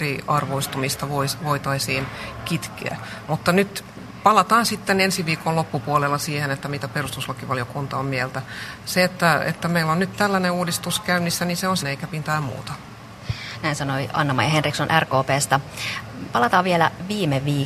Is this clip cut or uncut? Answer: cut